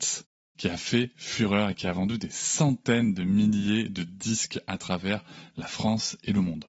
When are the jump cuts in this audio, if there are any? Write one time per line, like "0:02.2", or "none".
none